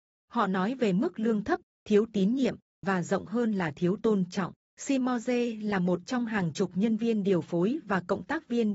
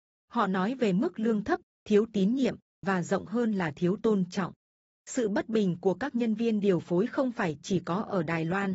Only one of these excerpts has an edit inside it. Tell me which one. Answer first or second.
first